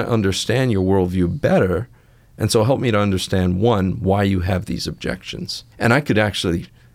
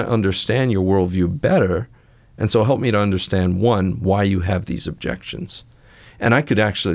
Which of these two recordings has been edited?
first; 1 cut; at 5.7 s

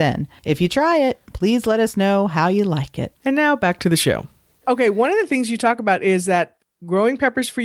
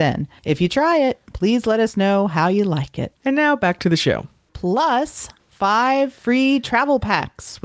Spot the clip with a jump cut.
second; 1 cut; at 4.5 s

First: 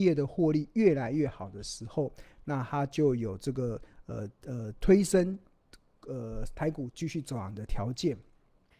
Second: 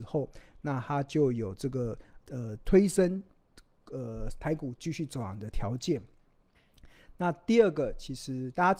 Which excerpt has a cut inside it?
second; 1 cut; at 2.2 s

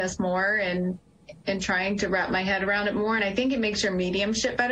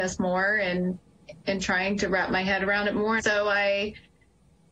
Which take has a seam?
second; 1 cut; at 3.2 s

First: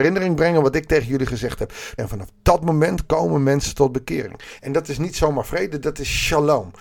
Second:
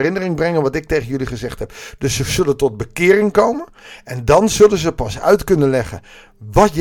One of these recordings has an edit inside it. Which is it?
first; 2 cuts; at 2.0 s, 4.6 s

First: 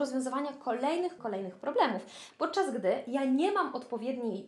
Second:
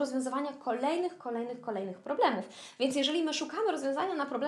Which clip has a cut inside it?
first; 2 cuts; at 1.2 s, 2.3 s

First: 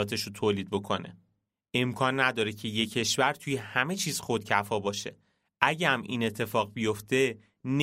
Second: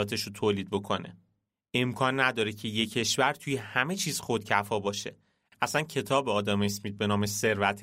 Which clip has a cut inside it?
second; 1 cut; at 5.5 s

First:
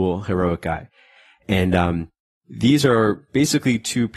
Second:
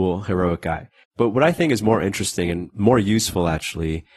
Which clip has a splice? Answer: second; 1 cut; at 1.0 s

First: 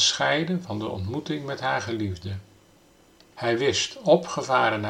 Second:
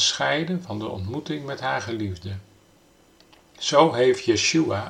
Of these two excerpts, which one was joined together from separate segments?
first; 1 cut; at 3.3 s

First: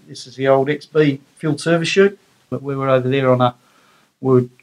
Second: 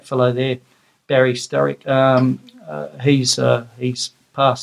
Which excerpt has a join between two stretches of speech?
first; 1 cut; at 2.5 s

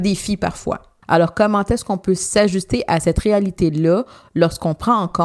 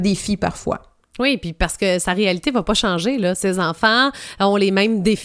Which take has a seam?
first; 1 cut; at 1.0 s

